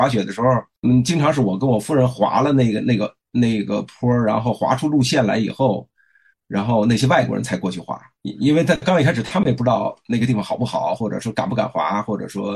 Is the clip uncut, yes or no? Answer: yes